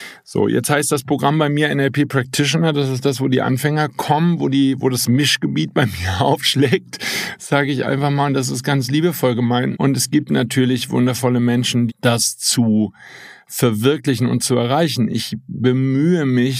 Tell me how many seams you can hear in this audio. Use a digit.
2